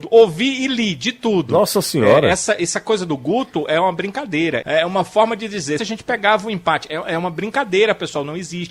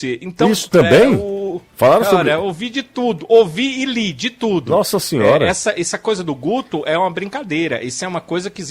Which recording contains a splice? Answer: first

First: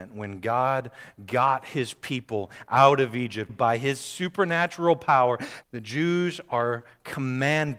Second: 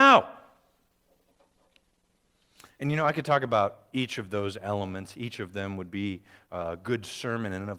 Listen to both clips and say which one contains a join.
first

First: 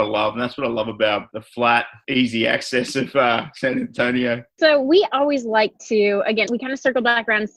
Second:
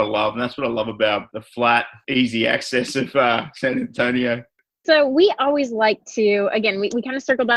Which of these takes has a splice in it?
first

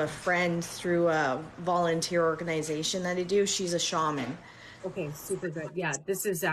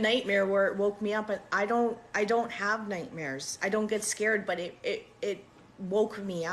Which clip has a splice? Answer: first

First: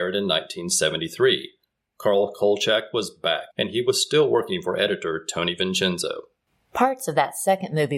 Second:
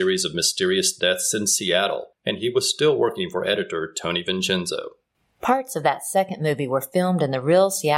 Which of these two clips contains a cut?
first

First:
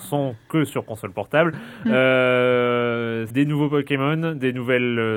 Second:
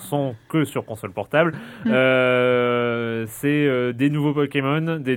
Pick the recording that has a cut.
first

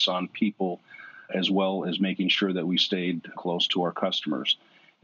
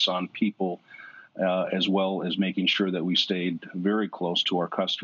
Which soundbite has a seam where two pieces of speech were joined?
first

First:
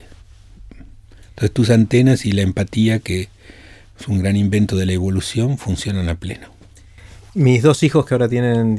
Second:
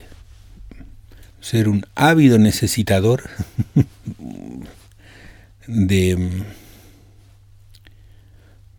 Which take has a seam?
second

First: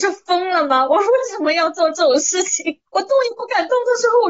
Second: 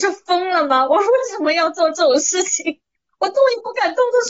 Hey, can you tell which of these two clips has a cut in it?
first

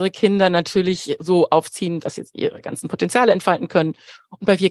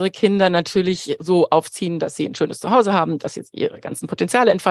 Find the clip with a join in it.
first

